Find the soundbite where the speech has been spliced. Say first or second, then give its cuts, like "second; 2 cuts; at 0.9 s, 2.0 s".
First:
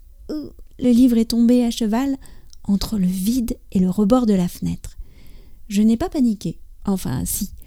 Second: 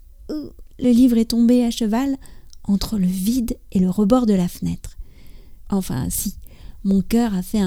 second; 1 cut; at 5.6 s